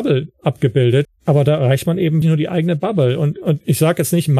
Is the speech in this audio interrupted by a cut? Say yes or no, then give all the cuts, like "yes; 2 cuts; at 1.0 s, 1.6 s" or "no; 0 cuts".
yes; 2 cuts; at 1.0 s, 2.2 s